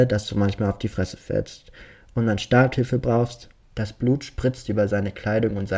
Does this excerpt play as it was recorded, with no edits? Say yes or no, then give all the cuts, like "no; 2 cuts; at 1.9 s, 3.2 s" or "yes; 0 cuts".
no; 1 cut; at 3.6 s